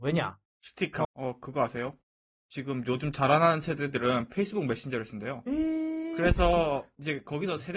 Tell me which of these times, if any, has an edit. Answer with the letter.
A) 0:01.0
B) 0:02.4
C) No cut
A